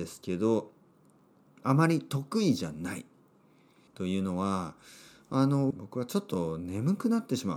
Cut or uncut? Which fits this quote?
cut